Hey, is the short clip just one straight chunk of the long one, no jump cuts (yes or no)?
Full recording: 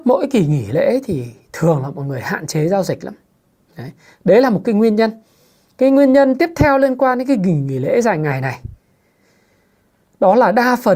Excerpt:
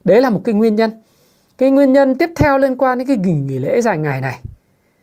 yes